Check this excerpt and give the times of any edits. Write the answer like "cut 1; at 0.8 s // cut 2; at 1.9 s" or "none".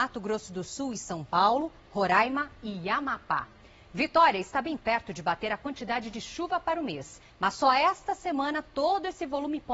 none